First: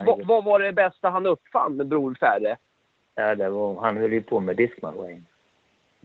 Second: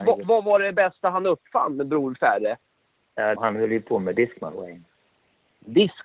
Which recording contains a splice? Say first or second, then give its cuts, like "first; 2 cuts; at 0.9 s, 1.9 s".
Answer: second; 1 cut; at 3.4 s